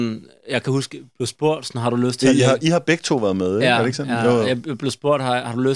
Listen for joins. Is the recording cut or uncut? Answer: uncut